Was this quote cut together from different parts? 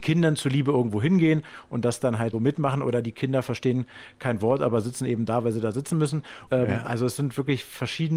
yes; 2 cuts; at 2.3 s, 6.5 s

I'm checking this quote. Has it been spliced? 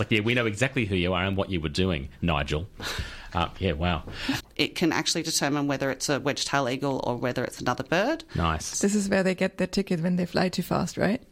yes; 2 cuts; at 4.4 s, 8.7 s

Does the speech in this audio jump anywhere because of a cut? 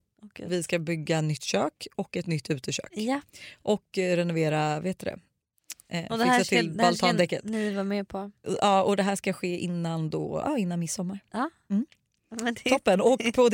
no; 0 cuts

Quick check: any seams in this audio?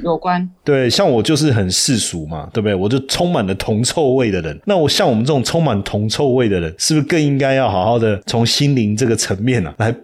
no; 0 cuts

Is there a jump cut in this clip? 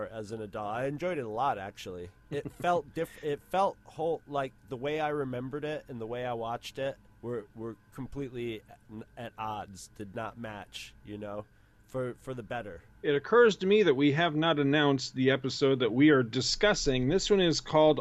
no; 0 cuts

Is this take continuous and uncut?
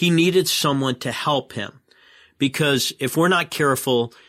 yes; 0 cuts

